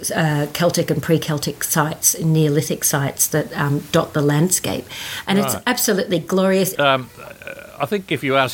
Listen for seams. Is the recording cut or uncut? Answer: cut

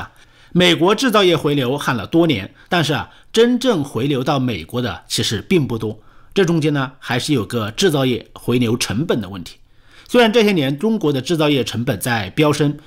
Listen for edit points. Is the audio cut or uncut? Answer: cut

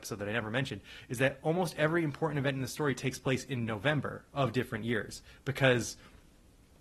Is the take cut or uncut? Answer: uncut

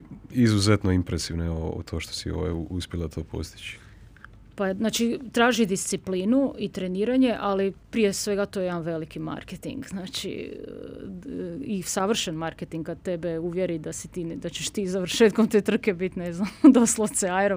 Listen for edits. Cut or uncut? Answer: uncut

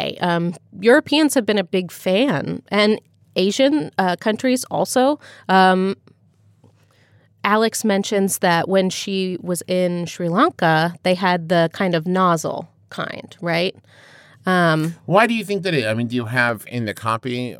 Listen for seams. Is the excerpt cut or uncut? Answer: uncut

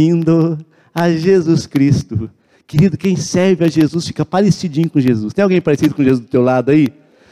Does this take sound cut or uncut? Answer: uncut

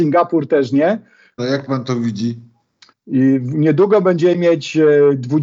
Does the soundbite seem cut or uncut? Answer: cut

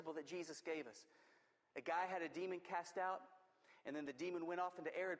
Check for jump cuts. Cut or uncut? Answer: uncut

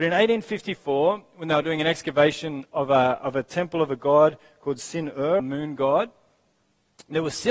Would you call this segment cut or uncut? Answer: cut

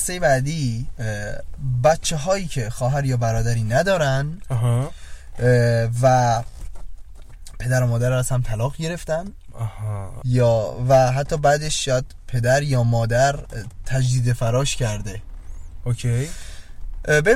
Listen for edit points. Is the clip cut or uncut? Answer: cut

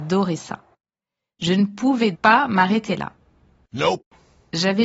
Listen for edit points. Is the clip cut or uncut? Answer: cut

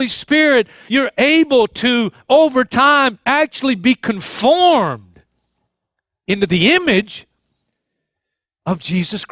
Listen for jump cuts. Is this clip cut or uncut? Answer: uncut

